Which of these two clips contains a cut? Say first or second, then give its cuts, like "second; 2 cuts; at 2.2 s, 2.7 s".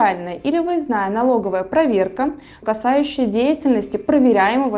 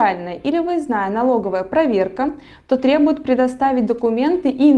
first; 1 cut; at 2.6 s